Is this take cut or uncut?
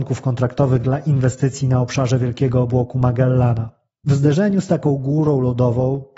cut